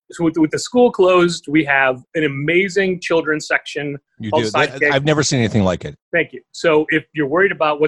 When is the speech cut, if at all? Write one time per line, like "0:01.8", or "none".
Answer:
0:06.0